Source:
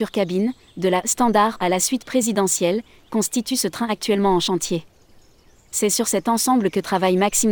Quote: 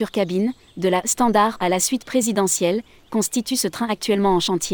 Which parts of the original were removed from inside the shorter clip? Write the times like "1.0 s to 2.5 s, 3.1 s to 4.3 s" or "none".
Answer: none